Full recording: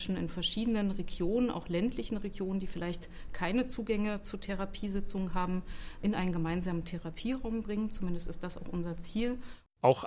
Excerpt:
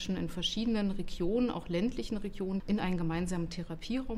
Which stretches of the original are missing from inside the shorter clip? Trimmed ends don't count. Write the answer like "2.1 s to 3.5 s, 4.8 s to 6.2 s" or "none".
2.6 s to 5.9 s